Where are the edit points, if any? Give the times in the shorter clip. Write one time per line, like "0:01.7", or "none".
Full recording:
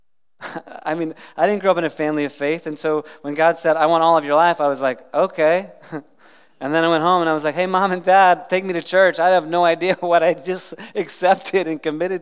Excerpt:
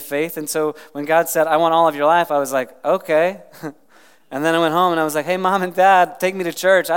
none